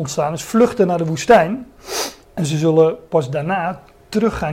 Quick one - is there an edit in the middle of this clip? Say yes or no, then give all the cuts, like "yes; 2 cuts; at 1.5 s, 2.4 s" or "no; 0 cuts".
yes; 1 cut; at 2.2 s